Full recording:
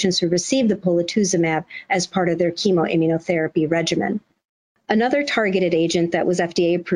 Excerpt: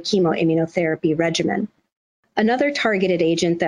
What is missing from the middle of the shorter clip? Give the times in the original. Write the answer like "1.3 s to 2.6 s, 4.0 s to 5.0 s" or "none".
none